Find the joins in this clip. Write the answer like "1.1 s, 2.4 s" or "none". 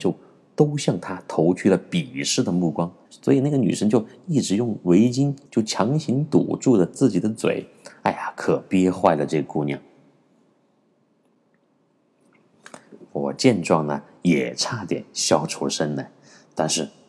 3.1 s, 5.5 s